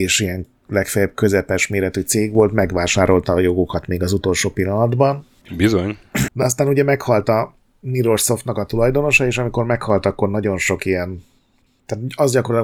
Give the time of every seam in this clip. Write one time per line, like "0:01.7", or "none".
0:06.3